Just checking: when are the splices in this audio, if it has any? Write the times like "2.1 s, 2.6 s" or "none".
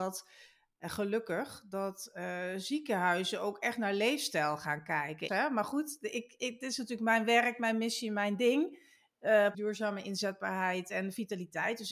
5.3 s, 9.5 s